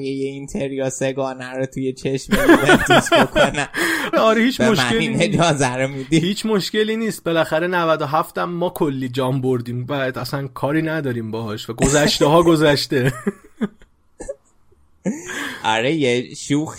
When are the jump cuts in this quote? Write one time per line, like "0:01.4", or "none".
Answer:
0:04.1